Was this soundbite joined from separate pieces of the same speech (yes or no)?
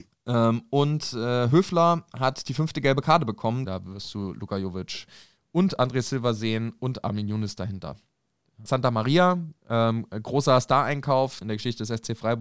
yes